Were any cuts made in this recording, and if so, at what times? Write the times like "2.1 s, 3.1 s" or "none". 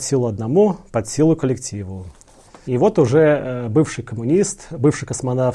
2.6 s